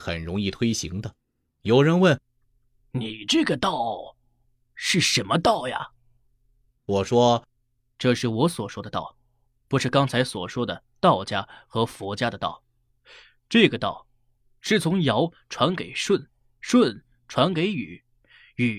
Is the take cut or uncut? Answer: cut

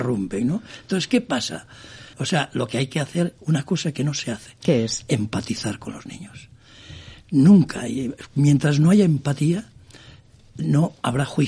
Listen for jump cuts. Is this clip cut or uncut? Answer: cut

